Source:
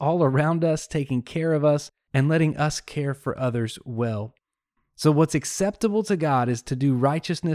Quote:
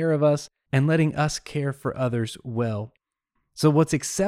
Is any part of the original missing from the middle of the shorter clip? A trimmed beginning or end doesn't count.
no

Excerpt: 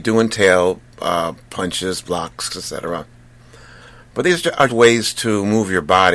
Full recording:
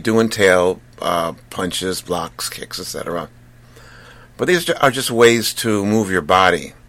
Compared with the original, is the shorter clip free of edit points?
no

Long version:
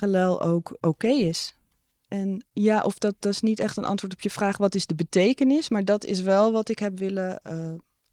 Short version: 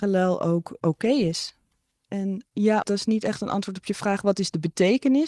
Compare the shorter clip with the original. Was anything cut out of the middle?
yes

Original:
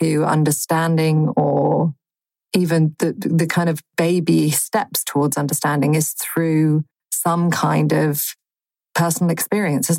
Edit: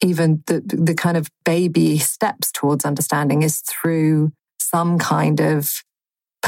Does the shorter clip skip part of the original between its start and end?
no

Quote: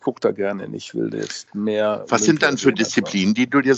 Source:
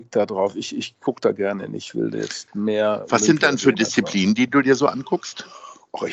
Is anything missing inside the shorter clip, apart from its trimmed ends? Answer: no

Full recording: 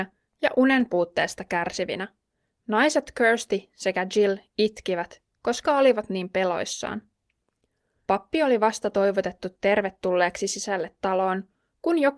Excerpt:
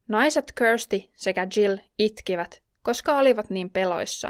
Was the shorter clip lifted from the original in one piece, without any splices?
yes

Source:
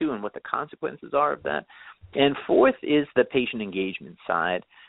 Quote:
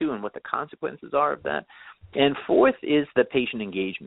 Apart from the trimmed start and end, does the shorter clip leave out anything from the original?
no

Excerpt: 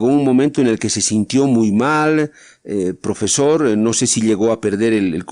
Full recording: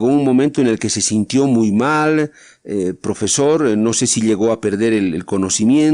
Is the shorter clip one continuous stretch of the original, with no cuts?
yes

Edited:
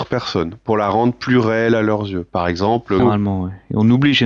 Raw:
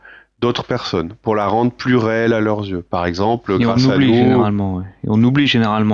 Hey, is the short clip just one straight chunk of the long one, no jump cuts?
no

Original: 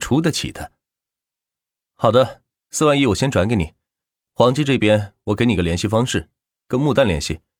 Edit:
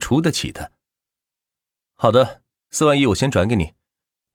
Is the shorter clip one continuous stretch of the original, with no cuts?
yes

